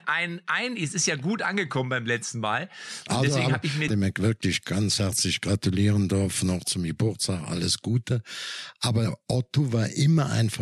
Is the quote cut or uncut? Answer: cut